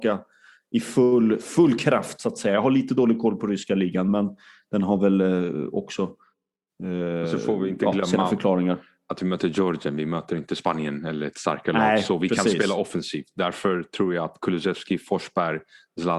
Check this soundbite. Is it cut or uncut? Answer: uncut